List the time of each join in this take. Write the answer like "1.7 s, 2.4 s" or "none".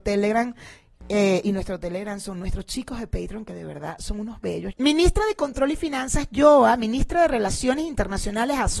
4.7 s